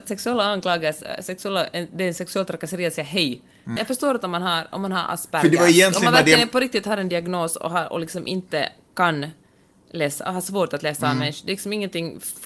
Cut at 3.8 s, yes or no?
yes